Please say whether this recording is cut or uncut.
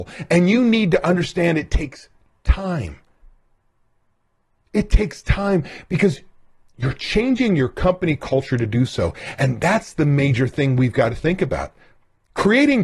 uncut